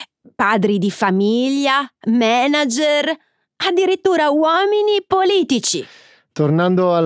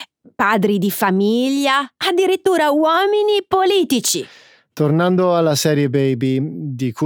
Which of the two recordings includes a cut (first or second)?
second